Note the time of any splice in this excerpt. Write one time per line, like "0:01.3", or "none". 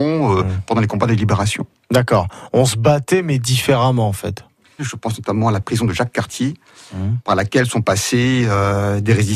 0:04.8